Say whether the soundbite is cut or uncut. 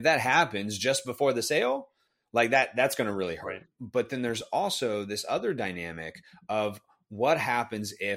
cut